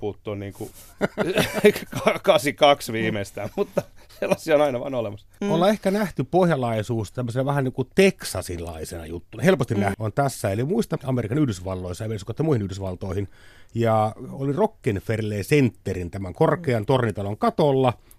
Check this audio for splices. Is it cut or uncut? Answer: cut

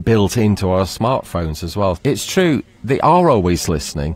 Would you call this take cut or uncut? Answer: cut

